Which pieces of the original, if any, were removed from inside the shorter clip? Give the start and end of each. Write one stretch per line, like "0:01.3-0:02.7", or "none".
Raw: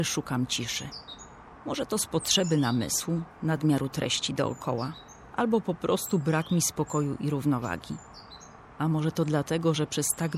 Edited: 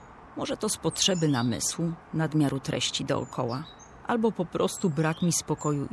none